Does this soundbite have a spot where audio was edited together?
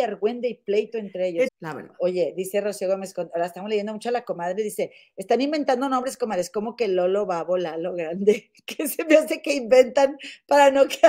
yes; 1 cut; at 1.5 s

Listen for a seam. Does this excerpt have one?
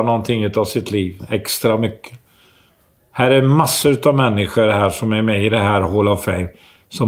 no; 0 cuts

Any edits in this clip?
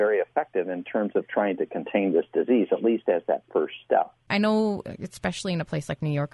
yes; 1 cut; at 4.3 s

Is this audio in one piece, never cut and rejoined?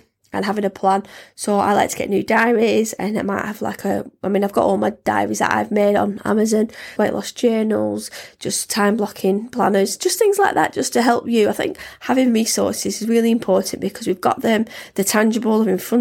no; 1 cut; at 7.0 s

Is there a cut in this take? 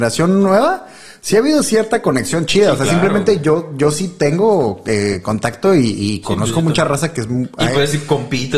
no; 0 cuts

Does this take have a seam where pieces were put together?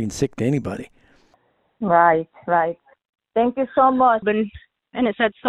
yes; 1 cut; at 4.2 s

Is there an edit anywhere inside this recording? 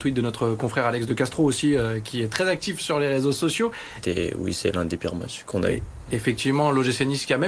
yes; 1 cut; at 4.0 s

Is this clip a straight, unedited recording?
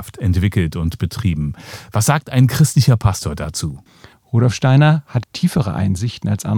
no; 2 cuts; at 4.1 s, 5.2 s

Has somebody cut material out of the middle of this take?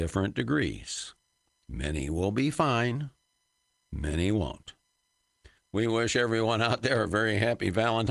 yes; 1 cut; at 5.6 s

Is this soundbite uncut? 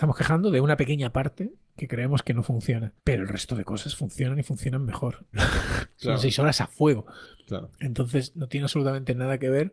no; 3 cuts; at 1.8 s, 3.0 s, 5.3 s

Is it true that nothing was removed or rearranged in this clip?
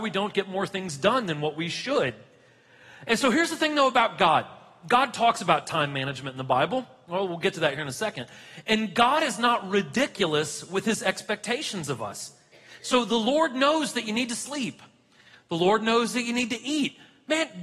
yes; 0 cuts

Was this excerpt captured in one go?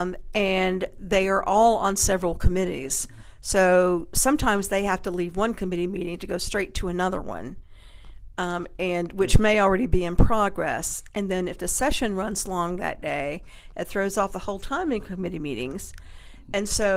yes; 0 cuts

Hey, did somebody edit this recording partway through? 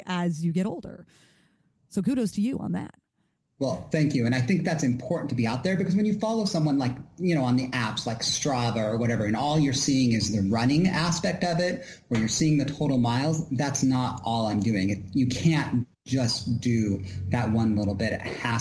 no; 0 cuts

